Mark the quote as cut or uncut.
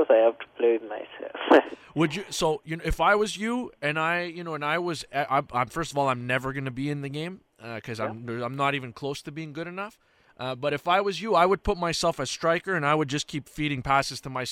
uncut